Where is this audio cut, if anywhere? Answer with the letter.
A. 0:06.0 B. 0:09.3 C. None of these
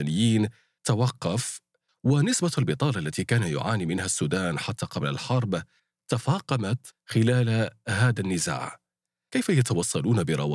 B